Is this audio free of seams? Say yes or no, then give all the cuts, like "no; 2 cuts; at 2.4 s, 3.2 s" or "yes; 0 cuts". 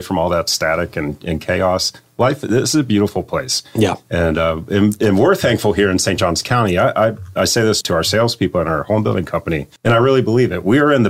no; 2 cuts; at 7.8 s, 9.8 s